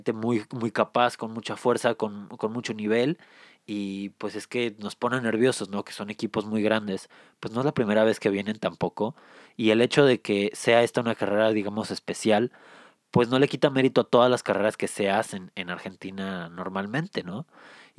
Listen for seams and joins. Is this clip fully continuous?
yes; 0 cuts

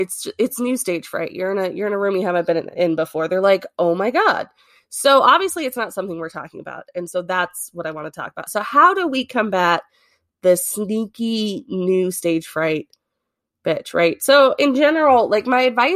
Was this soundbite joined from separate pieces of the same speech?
no; 0 cuts

